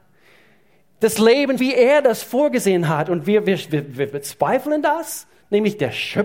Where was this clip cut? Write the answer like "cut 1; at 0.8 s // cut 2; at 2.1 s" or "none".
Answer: cut 1; at 1.6 s